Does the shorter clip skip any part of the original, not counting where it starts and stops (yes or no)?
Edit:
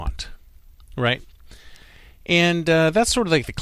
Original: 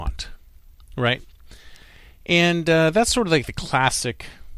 no